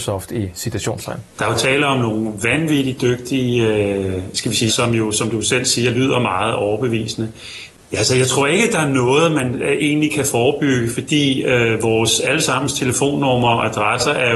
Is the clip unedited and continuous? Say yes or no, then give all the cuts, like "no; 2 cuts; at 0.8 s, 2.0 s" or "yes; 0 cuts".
no; 3 cuts; at 1.3 s, 4.7 s, 7.8 s